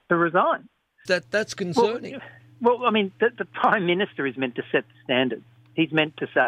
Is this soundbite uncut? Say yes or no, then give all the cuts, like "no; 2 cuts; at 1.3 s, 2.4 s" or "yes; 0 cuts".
no; 1 cut; at 1.1 s